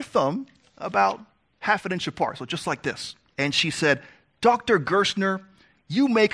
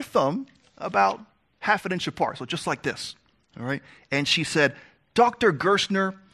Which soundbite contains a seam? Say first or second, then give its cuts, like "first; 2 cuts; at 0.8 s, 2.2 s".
first; 1 cut; at 3.3 s